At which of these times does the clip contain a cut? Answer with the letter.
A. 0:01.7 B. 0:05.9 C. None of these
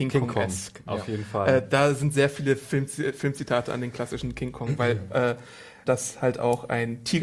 B